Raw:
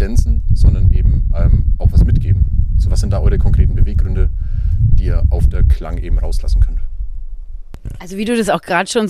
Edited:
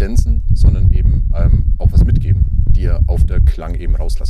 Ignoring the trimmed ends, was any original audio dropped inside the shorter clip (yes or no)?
yes